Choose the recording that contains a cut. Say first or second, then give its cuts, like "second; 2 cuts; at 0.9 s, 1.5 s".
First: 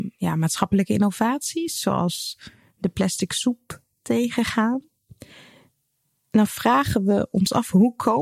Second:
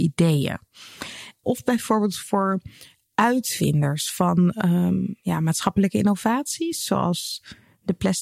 second; 1 cut; at 1.4 s